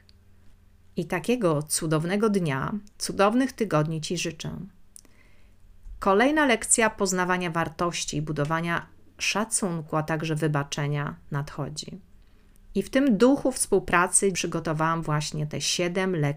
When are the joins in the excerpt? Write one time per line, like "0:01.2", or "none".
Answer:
0:14.3